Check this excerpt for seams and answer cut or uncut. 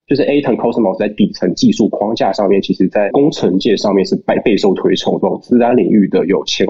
cut